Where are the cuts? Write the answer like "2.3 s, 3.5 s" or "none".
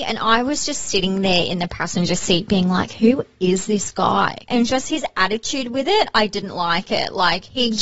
4.5 s